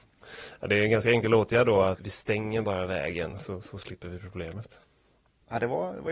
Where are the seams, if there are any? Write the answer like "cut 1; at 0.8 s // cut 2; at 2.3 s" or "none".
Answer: cut 1; at 2.0 s